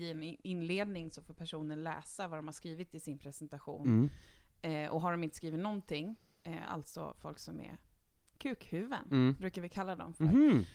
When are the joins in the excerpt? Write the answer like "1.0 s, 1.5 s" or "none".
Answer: none